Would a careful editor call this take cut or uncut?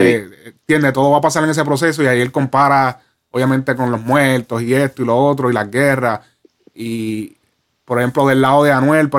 uncut